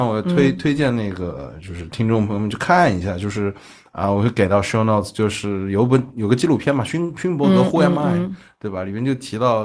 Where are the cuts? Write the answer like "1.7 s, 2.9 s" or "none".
none